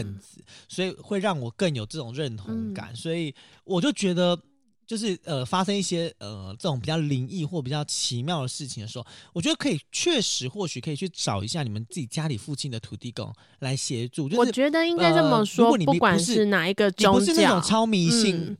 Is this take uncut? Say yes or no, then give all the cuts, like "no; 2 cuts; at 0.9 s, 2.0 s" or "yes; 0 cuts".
yes; 0 cuts